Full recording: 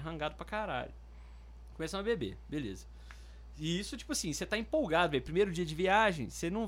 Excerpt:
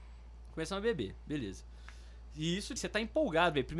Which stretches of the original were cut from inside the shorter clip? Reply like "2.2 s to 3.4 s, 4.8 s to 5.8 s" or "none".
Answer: 4.0 s to 4.3 s

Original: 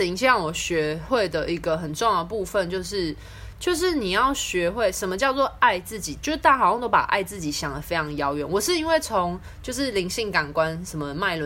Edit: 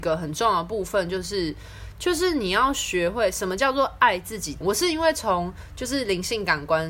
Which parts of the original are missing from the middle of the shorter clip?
6.2 s to 8.5 s

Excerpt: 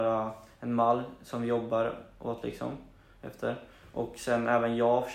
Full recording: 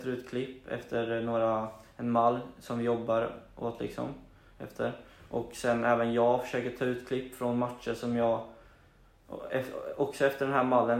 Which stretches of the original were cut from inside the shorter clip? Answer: none

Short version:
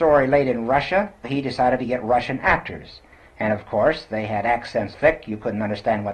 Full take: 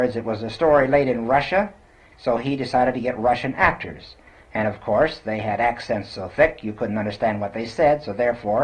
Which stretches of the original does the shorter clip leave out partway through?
1.8 s to 2.4 s, 6.1 s to 6.3 s

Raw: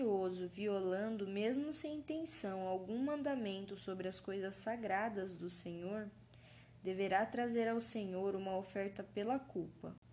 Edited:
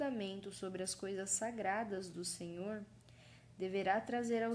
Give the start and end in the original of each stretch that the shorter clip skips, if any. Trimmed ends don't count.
none

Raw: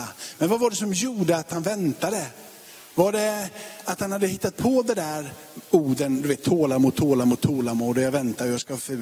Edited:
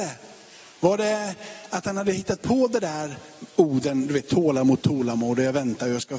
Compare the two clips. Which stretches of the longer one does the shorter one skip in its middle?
6.9 s to 7.4 s

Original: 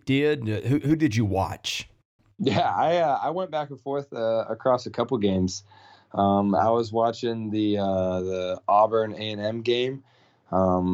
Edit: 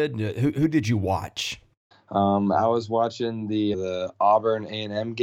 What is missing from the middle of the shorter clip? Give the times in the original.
2.2 s to 5.9 s, 7.8 s to 8.2 s

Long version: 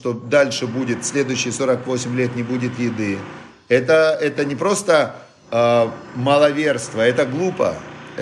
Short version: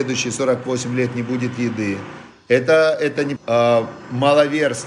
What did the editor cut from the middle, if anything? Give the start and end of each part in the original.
4.6 s to 5.4 s

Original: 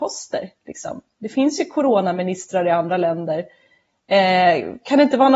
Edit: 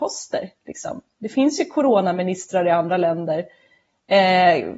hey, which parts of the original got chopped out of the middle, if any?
none

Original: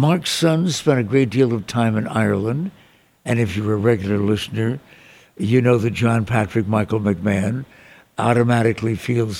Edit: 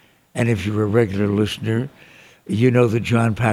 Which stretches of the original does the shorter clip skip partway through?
none

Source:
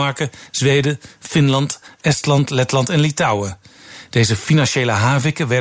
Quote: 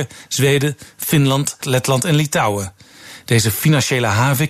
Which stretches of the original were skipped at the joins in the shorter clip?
1.8 s to 2.5 s

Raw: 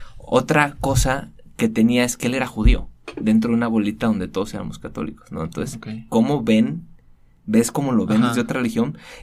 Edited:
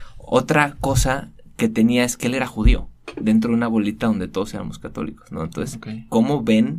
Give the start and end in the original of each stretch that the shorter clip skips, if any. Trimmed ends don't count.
none

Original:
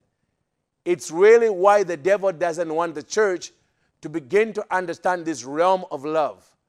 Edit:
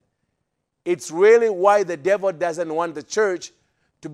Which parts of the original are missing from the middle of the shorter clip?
none

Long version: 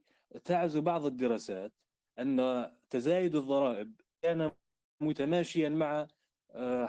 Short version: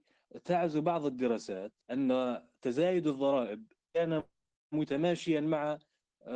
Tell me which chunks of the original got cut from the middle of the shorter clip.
1.8 s to 2.1 s

